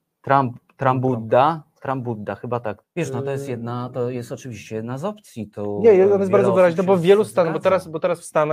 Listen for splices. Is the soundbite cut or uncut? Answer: cut